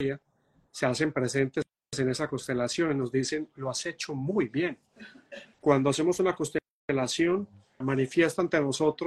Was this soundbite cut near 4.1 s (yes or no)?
no